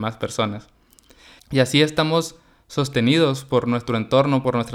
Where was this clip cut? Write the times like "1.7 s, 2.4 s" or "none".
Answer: 1.4 s